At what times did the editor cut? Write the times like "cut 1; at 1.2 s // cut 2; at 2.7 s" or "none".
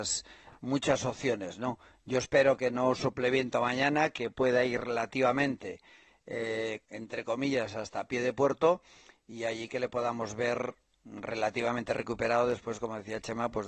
cut 1; at 6.9 s